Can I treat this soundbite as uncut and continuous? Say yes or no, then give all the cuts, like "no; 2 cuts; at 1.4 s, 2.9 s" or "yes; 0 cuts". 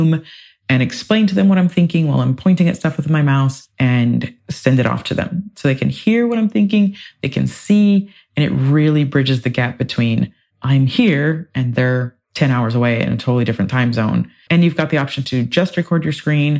no; 1 cut; at 14.5 s